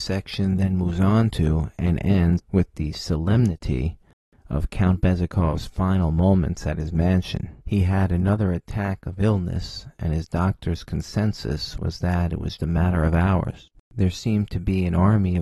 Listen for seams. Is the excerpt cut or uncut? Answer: cut